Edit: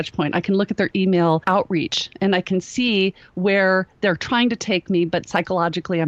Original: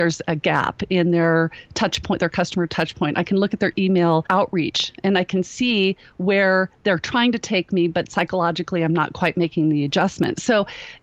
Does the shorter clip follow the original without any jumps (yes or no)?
yes